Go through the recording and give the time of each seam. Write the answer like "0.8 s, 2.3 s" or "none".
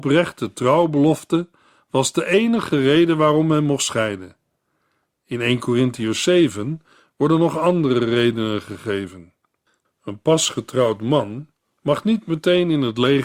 9.8 s